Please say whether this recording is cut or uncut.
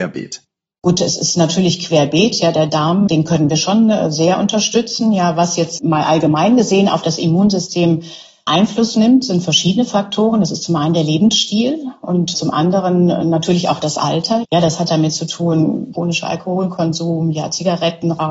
cut